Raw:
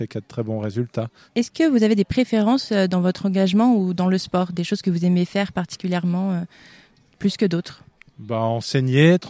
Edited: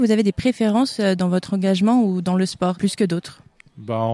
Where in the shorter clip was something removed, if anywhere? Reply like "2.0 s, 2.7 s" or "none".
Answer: 2.7 s